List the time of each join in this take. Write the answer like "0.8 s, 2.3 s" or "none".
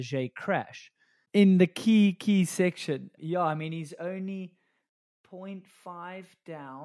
1.3 s, 3.2 s